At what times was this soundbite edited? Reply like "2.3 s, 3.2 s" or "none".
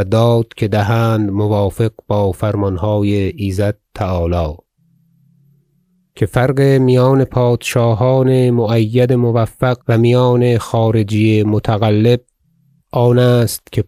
9.8 s

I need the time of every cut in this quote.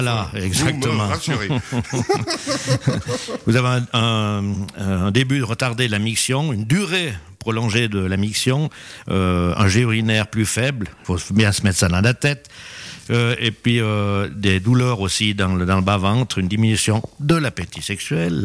11.0 s

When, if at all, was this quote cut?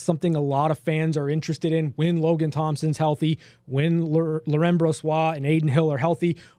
none

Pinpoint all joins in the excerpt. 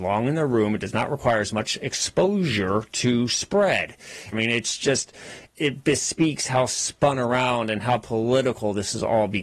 4.3 s, 5.5 s

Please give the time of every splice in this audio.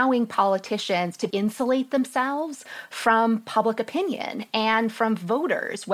1.3 s

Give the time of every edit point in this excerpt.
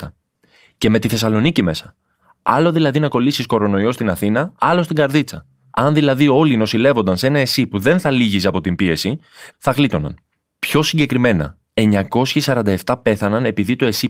5.7 s, 9.5 s

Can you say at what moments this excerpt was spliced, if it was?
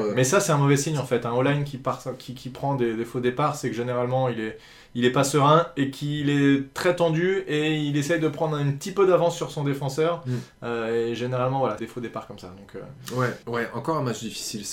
11.8 s, 13.4 s

